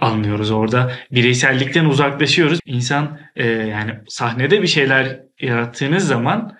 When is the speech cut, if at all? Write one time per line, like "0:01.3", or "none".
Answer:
0:02.6